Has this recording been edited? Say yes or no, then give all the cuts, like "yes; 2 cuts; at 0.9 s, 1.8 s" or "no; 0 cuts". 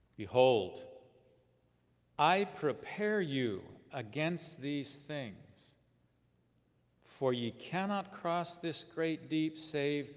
no; 0 cuts